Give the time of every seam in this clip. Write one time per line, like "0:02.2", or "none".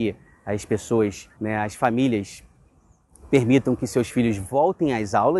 0:01.3